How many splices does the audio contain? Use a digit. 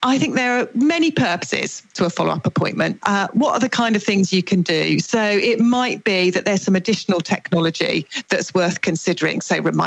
1